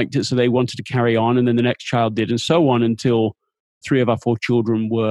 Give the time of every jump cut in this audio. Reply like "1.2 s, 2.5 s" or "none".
3.8 s